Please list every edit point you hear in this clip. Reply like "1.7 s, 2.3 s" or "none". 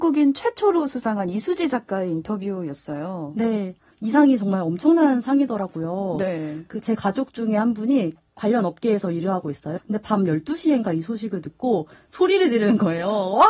9.8 s